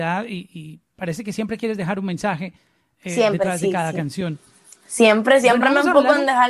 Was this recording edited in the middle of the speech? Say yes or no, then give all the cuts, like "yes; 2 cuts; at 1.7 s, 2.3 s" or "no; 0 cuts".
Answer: no; 0 cuts